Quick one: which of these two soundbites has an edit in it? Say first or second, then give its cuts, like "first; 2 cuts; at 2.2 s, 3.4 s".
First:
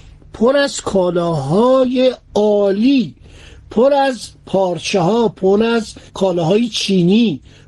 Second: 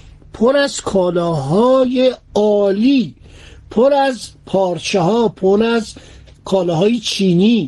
first; 1 cut; at 6.1 s